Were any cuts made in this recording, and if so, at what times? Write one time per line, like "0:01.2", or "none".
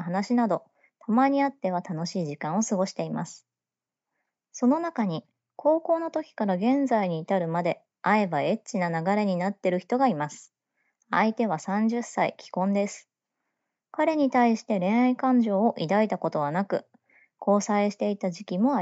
none